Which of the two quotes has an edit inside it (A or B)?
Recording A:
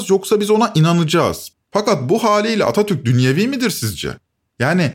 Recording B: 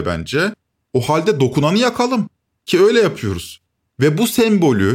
A